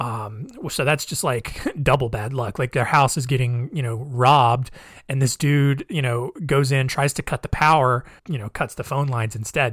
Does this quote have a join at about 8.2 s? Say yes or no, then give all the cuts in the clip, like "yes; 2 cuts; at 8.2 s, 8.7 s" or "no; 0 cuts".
yes; 1 cut; at 8.2 s